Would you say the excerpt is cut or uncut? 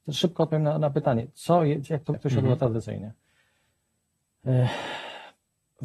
cut